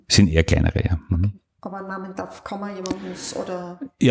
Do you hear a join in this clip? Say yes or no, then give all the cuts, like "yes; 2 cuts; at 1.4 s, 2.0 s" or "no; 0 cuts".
no; 0 cuts